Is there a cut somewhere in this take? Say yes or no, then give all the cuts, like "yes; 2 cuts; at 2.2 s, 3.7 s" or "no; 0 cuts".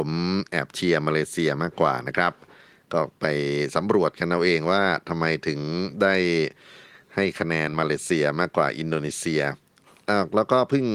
no; 0 cuts